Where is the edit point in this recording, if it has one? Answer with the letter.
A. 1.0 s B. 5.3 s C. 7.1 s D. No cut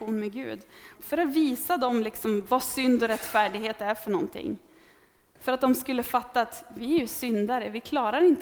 A